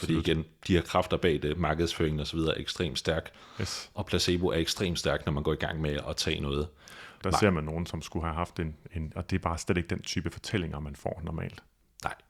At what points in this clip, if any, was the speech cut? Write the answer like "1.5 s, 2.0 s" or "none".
7.2 s, 9.1 s